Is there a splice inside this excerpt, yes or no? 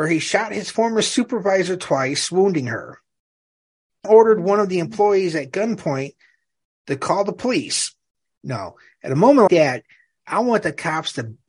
yes